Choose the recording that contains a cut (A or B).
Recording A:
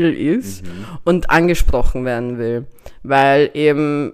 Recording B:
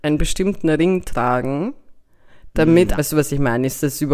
B